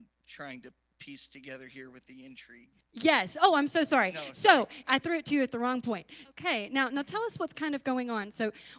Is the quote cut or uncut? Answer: cut